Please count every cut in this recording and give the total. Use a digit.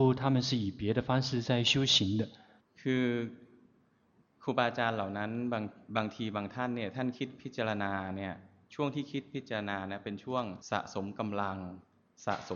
2